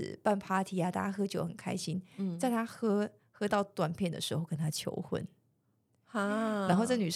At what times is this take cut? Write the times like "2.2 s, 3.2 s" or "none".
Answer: none